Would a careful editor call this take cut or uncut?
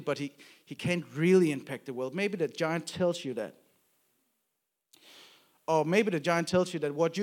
uncut